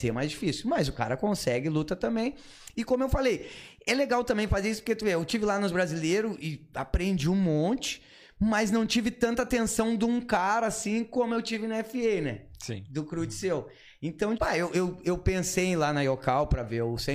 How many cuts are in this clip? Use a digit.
1